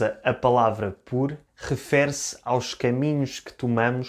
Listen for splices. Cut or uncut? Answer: cut